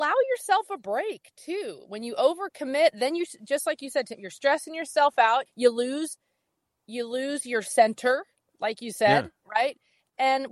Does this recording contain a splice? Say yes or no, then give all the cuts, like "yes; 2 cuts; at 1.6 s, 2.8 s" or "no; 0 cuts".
yes; 1 cut; at 5.5 s